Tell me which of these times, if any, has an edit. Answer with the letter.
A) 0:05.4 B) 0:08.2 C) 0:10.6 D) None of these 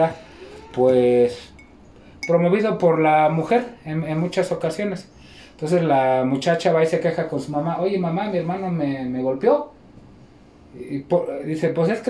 A